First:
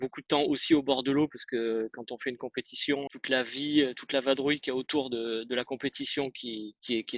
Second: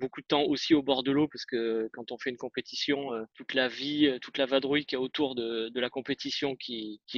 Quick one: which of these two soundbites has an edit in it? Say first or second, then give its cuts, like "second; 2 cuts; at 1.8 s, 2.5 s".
first; 1 cut; at 3.1 s